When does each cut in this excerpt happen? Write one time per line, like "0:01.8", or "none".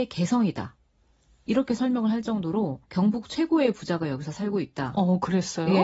0:02.8